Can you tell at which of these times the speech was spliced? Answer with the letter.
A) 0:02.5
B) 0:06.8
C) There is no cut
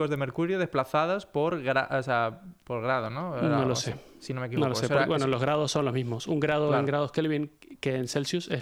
C